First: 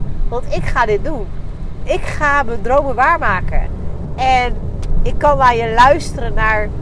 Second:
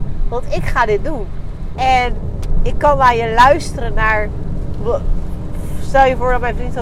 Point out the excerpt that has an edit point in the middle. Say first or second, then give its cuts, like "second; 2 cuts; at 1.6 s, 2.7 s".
second; 2 cuts; at 1.8 s, 4.8 s